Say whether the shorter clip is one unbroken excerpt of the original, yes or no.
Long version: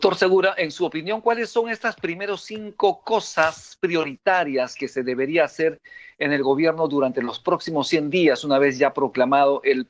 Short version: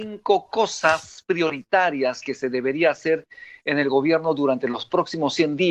yes